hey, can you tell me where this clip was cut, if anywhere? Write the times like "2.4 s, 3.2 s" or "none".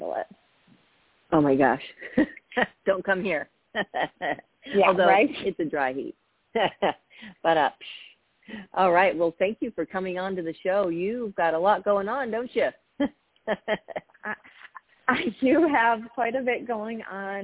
none